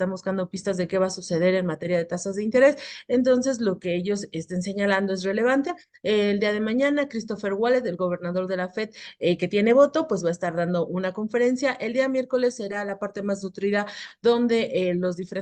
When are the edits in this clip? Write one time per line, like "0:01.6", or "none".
none